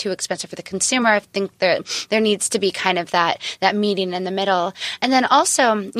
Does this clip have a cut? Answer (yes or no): no